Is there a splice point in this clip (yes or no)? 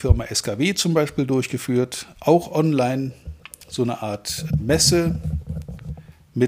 yes